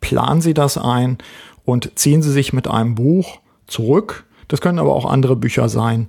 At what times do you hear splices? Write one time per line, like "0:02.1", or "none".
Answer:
0:04.4